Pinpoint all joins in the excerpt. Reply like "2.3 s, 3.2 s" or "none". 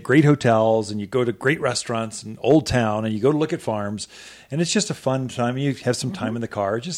none